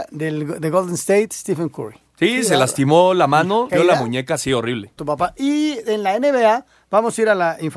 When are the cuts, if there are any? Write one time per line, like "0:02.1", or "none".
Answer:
0:03.7
0:05.0